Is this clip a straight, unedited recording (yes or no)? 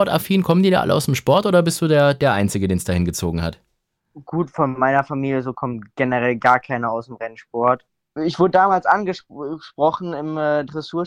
no